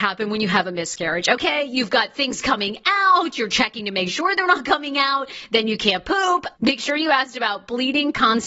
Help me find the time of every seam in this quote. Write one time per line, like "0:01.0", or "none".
0:06.6